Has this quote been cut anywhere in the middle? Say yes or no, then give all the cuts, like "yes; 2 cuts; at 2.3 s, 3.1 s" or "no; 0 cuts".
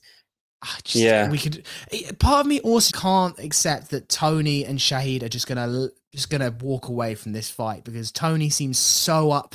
yes; 1 cut; at 2.9 s